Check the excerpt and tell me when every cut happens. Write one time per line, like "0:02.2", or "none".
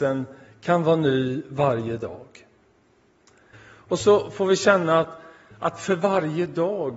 0:03.5